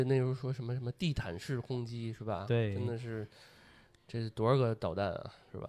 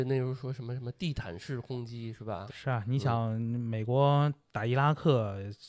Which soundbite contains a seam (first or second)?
second